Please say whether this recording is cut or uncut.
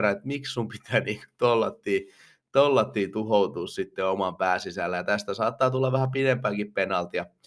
uncut